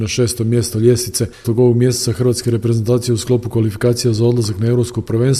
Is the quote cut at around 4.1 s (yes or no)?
no